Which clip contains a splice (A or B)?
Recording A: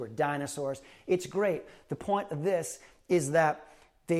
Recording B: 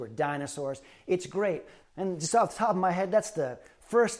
B